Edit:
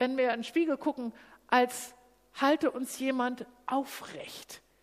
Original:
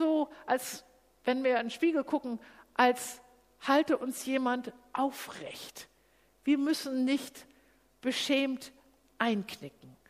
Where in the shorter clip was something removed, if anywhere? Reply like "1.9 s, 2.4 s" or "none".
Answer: none